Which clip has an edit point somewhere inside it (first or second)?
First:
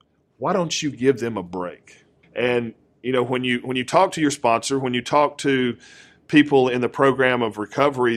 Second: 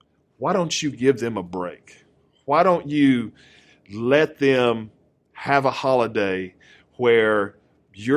first